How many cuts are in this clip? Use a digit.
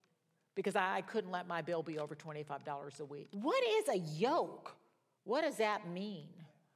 1